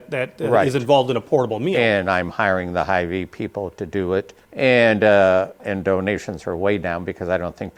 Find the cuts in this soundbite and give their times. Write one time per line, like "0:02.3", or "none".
0:04.4
0:05.6